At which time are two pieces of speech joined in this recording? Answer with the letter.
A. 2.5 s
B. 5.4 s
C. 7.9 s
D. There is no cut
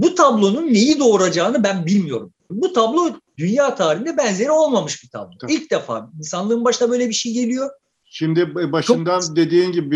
A